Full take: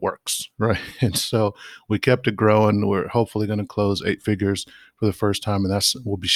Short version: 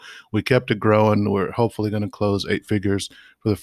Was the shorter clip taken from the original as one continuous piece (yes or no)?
yes